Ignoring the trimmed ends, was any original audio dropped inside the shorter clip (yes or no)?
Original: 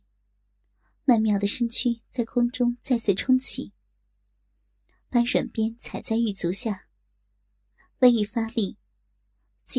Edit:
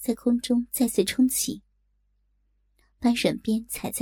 no